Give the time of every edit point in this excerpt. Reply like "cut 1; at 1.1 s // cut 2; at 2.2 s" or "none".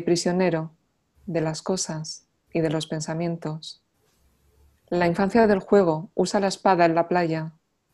none